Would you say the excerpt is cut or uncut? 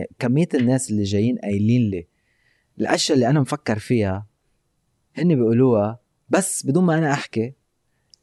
uncut